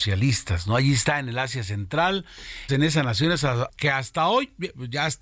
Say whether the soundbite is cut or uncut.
cut